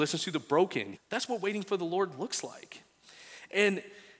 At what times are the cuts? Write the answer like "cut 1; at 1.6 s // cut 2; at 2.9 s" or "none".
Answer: cut 1; at 0.9 s